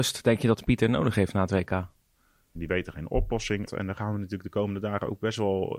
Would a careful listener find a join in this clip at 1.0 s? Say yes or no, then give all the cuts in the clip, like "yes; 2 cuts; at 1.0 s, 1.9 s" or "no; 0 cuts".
no; 2 cuts; at 2.5 s, 3.7 s